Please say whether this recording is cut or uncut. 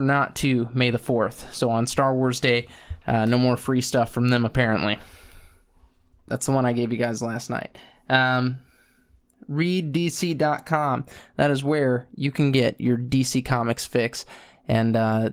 cut